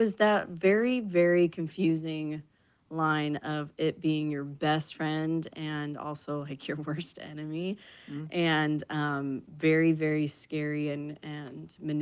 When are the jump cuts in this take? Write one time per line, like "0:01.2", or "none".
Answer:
none